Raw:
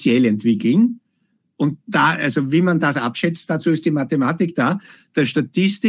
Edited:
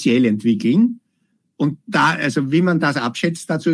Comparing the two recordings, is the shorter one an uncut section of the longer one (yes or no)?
yes